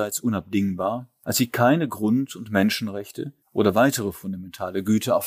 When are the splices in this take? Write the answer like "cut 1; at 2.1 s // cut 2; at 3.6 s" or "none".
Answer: cut 1; at 1.2 s // cut 2; at 3.4 s